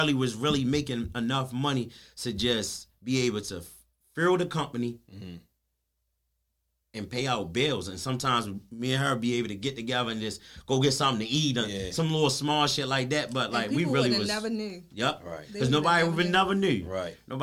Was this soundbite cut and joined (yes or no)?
no